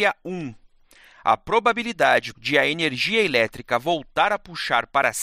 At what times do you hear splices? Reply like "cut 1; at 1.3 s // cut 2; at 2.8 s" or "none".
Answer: cut 1; at 2.3 s